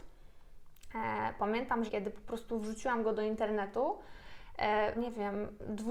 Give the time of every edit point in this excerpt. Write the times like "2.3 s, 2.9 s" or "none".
1.9 s, 4.9 s